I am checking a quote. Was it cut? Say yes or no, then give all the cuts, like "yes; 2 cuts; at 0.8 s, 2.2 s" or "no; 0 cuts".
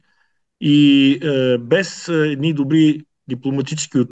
no; 0 cuts